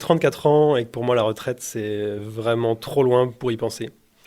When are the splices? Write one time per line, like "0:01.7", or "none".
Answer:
none